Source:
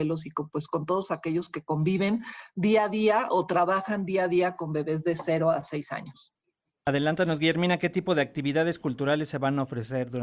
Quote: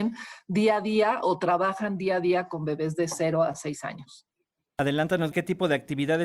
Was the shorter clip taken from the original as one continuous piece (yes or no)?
no